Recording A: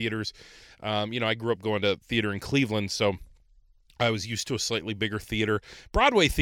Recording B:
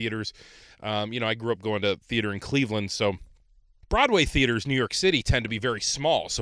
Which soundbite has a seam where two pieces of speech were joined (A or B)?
B